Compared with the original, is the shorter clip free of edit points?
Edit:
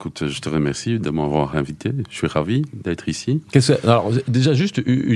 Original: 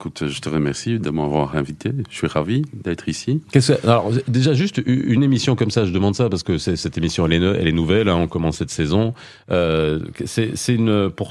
yes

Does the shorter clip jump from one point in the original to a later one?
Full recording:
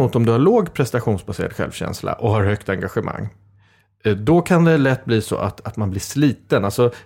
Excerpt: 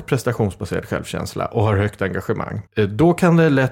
yes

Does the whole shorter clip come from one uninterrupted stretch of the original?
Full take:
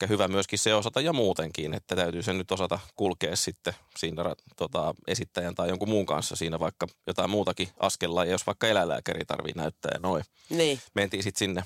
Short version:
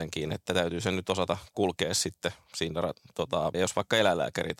no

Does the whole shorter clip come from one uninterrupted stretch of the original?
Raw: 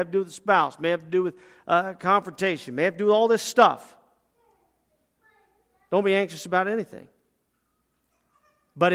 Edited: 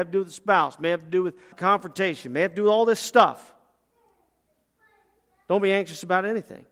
no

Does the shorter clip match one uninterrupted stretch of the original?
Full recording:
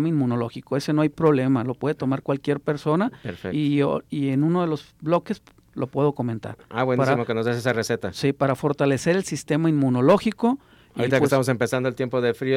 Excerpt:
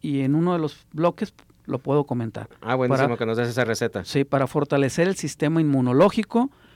yes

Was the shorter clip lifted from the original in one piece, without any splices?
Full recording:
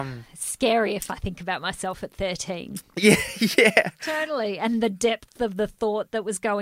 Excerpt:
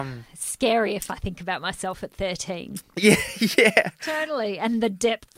yes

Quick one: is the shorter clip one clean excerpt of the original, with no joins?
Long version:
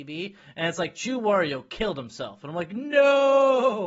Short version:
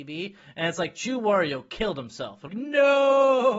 no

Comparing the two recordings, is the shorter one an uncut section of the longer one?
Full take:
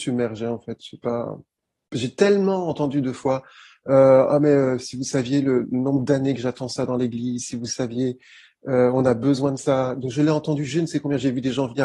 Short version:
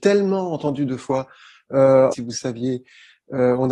no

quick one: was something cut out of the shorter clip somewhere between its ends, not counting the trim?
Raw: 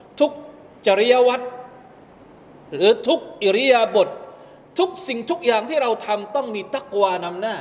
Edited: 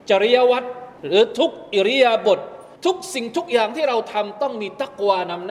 yes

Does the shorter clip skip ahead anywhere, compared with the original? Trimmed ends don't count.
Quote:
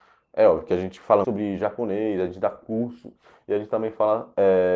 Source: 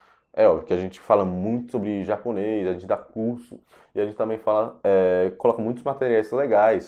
yes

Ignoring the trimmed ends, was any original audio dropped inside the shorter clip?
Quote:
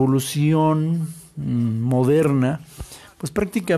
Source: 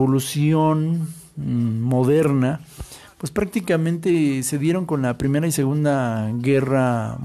no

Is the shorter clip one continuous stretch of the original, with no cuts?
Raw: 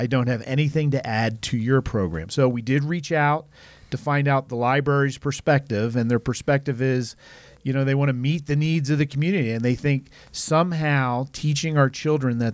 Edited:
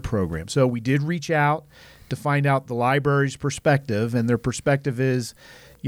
yes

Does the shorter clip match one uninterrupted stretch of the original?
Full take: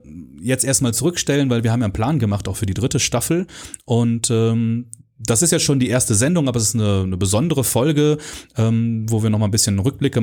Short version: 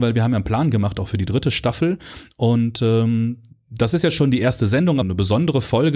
no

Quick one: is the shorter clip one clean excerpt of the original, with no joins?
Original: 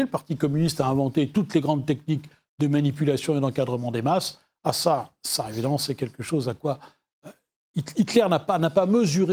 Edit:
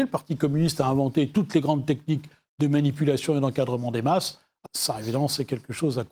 no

